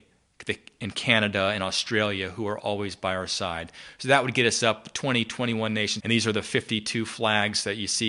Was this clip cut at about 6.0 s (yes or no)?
yes